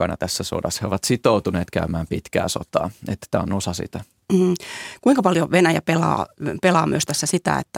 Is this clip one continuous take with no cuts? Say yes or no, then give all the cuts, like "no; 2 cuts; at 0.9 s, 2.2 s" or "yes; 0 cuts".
yes; 0 cuts